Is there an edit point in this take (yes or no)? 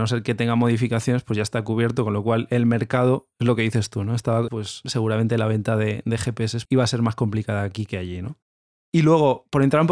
yes